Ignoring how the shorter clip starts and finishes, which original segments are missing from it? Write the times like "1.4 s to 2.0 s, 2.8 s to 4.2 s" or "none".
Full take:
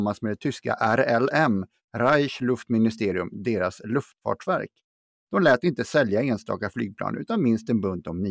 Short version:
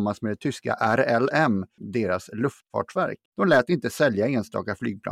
1.8 s to 3.3 s, 4.8 s to 5.2 s